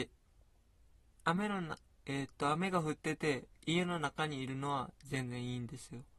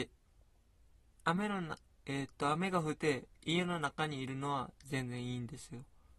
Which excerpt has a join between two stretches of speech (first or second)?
second